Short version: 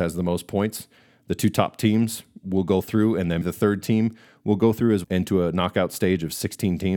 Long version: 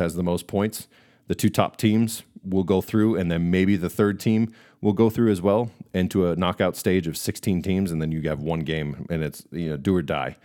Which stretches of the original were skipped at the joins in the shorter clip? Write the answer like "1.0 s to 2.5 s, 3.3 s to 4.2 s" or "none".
3.4 s to 3.8 s, 5.4 s to 5.9 s